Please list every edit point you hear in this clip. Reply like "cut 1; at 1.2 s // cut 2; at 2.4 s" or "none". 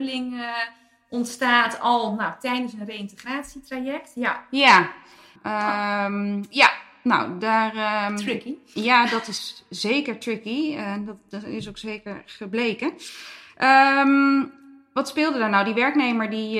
cut 1; at 5.4 s